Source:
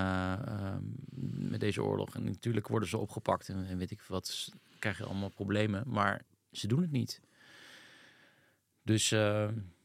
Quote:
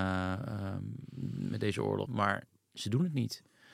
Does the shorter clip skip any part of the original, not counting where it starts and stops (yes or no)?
yes